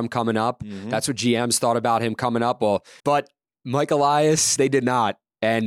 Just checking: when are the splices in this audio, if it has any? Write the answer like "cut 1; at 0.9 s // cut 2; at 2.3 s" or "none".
cut 1; at 3.0 s // cut 2; at 4.6 s